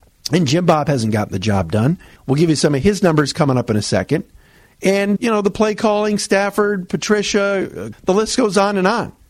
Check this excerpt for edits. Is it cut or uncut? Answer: cut